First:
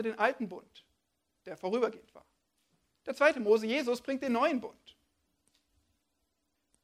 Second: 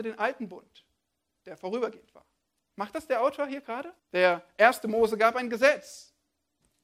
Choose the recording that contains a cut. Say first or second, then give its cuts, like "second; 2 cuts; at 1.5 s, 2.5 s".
second; 2 cuts; at 2.6 s, 4.0 s